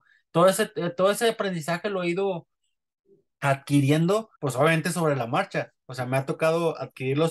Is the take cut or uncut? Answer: cut